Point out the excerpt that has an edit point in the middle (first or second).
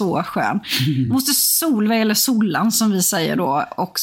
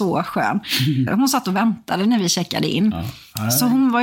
second